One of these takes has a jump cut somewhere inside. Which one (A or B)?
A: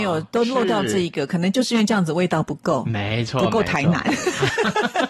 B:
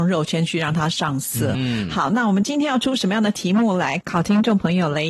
B